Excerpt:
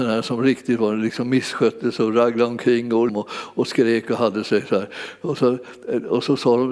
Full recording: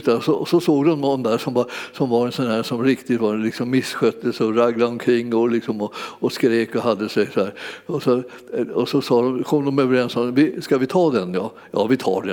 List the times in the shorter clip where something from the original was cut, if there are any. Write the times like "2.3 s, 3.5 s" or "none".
3.1 s